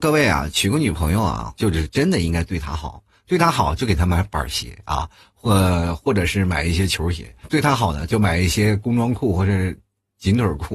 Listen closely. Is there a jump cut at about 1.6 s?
yes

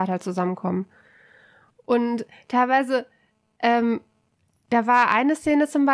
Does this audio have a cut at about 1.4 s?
no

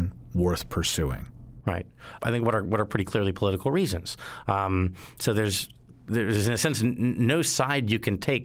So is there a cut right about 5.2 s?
no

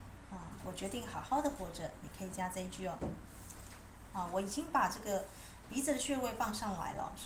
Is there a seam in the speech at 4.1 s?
yes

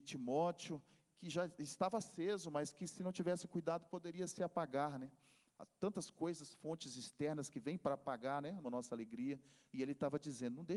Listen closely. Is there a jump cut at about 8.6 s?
yes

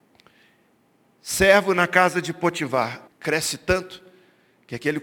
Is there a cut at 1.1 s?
no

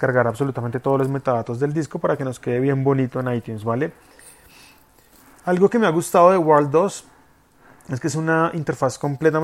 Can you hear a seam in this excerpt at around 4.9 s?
no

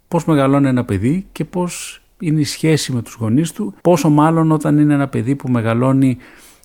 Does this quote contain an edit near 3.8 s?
yes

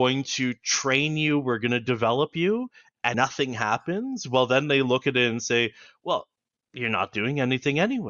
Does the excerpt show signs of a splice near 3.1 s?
yes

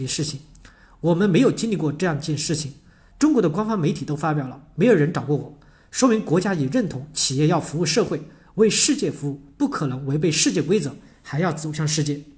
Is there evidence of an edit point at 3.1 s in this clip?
yes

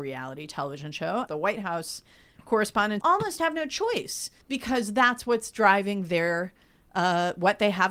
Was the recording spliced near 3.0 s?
yes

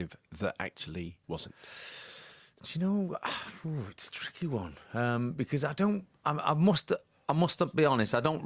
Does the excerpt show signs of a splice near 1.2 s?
yes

